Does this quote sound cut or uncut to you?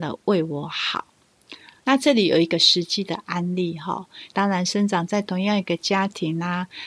cut